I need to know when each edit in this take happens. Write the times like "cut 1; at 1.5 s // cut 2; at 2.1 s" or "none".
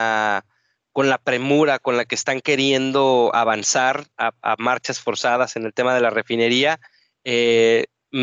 none